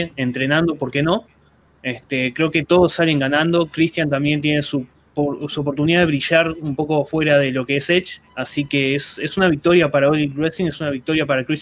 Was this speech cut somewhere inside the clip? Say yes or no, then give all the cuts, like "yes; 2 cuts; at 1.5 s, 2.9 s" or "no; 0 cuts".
yes; 1 cut; at 8.3 s